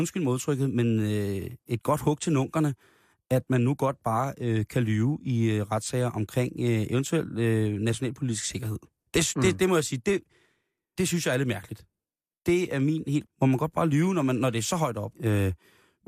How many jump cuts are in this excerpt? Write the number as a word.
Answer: three